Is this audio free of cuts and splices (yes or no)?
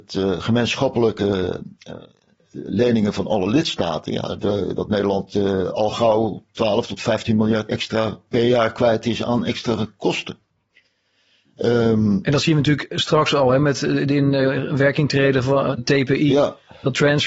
no